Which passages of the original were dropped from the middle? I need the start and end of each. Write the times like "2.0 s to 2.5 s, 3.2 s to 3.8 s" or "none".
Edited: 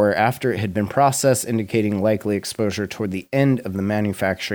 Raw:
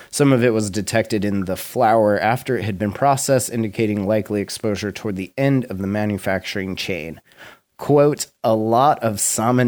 none